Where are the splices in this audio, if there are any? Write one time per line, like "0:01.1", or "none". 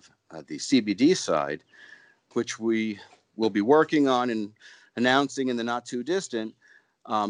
0:02.3